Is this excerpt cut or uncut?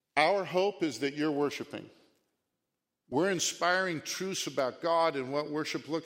uncut